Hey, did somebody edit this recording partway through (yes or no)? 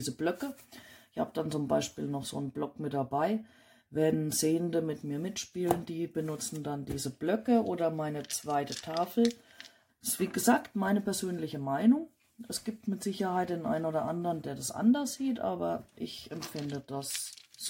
yes